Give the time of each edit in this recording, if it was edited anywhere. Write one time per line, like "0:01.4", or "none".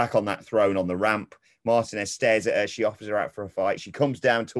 none